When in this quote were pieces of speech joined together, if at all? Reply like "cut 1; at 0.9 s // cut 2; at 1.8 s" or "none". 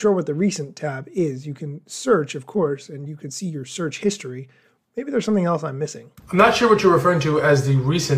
cut 1; at 6.2 s